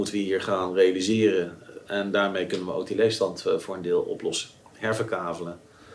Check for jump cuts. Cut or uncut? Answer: uncut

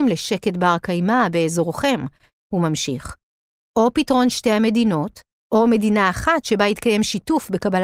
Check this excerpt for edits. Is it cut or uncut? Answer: cut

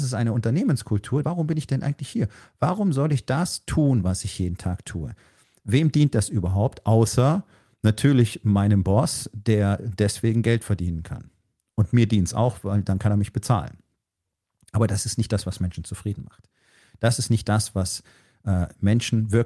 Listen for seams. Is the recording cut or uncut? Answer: cut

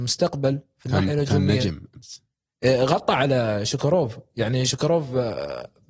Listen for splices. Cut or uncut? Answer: uncut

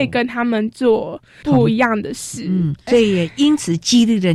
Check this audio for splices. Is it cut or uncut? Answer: uncut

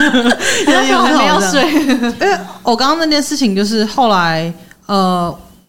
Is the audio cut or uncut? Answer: cut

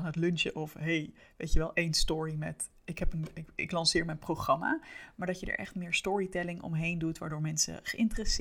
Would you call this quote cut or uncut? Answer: uncut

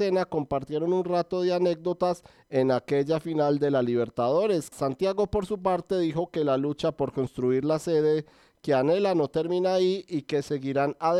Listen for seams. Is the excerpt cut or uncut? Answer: cut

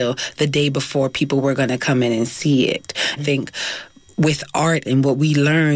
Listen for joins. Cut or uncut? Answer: cut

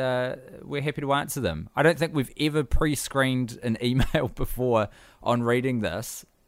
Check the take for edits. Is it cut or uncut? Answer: uncut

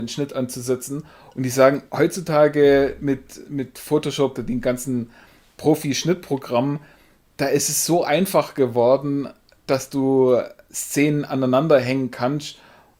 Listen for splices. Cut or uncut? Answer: cut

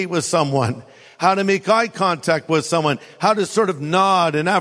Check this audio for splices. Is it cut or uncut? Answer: uncut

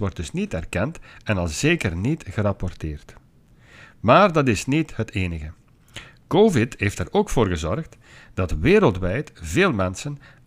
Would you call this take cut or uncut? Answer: uncut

